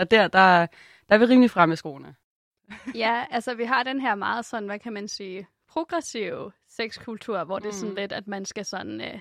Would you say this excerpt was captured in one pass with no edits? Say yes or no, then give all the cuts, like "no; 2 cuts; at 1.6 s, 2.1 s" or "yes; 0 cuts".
yes; 0 cuts